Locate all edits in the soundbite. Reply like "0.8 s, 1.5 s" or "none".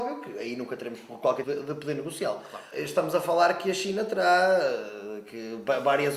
1.4 s, 2.7 s